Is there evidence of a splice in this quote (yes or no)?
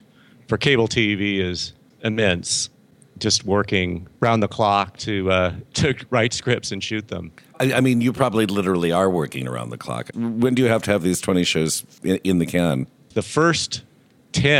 yes